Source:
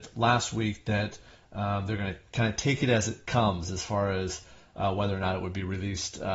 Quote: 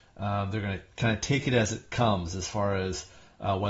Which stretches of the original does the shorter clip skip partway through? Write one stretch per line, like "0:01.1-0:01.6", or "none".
none